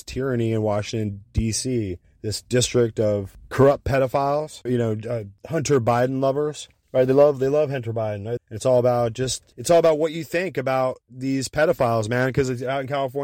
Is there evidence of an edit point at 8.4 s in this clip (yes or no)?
yes